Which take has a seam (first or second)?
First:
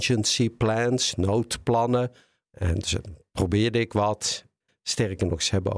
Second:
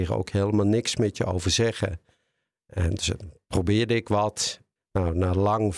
first